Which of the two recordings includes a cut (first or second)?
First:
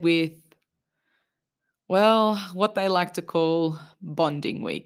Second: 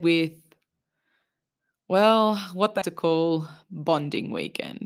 second